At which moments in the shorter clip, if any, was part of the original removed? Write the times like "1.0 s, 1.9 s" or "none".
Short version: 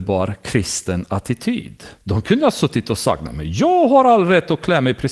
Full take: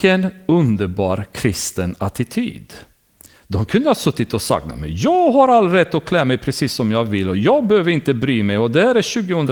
2.0 s